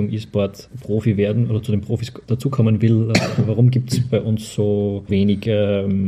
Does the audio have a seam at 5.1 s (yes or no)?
yes